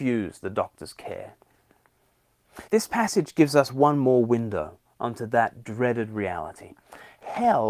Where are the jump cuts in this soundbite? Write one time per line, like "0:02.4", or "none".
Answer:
0:02.7